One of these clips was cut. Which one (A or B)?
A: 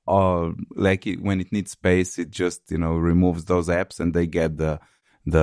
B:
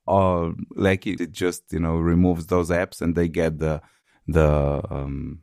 B